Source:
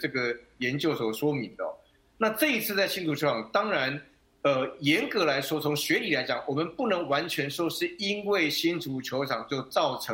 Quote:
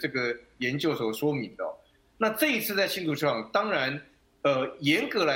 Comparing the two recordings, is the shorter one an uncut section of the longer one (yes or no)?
yes